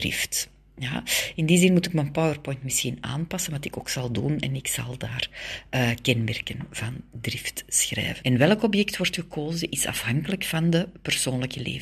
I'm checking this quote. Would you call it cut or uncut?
cut